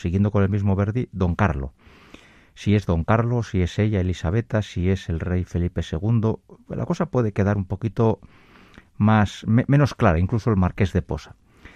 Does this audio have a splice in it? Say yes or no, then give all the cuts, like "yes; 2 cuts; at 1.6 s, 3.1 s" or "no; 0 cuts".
no; 0 cuts